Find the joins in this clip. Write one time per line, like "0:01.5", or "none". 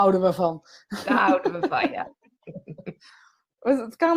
none